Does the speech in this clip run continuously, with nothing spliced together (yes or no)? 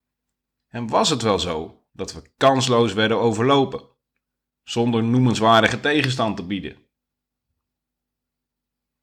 yes